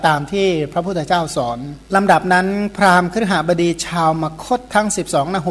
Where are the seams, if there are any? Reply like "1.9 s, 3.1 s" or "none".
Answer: 1.8 s